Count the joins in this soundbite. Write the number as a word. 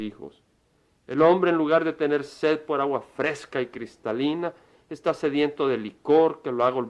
zero